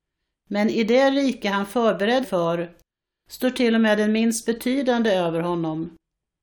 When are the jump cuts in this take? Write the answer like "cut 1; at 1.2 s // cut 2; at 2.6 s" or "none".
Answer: cut 1; at 2.2 s